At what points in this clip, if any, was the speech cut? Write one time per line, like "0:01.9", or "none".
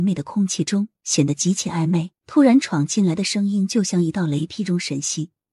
0:02.2